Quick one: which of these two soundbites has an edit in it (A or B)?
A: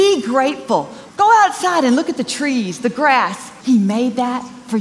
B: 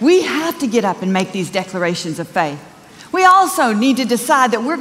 A